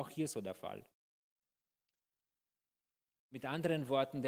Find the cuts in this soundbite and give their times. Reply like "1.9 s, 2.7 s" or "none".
3.2 s